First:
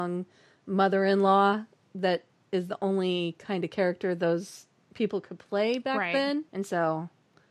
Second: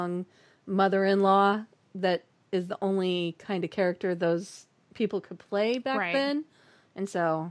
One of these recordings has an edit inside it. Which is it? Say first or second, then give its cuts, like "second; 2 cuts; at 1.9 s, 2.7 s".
first; 1 cut; at 6.5 s